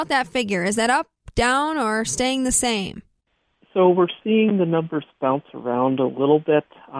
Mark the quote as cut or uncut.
uncut